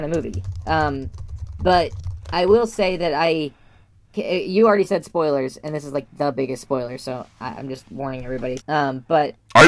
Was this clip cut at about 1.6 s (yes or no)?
no